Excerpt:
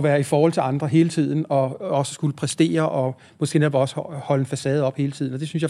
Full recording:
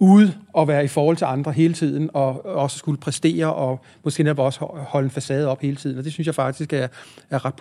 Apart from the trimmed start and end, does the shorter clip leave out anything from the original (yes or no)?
no